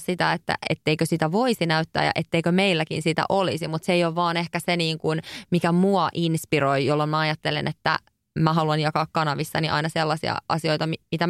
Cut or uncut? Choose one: uncut